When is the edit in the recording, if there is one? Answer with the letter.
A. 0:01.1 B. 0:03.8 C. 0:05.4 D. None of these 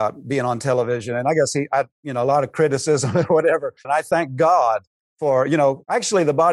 B